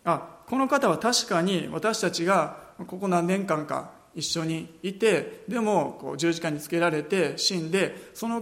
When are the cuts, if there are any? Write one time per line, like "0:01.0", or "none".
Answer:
none